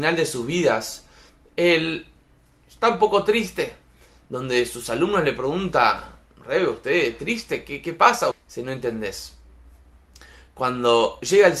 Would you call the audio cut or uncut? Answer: cut